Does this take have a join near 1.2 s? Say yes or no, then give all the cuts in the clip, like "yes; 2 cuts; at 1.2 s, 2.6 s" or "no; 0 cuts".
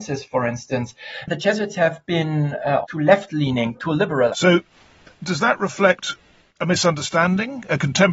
no; 2 cuts; at 2.8 s, 4.3 s